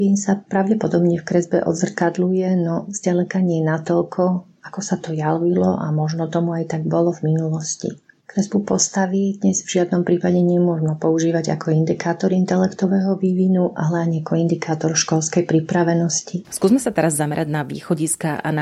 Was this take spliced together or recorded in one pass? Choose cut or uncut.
cut